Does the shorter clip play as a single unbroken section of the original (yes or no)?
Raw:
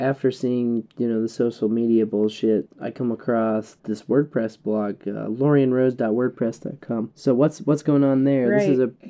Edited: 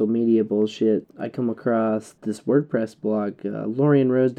yes